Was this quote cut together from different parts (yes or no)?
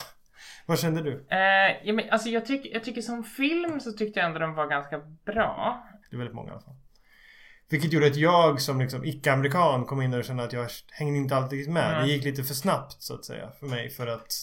yes